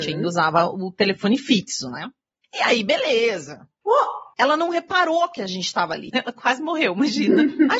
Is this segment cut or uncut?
cut